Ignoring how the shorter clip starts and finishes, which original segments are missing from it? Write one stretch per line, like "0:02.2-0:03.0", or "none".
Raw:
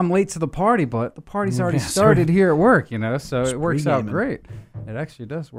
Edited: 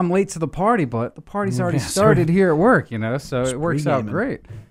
none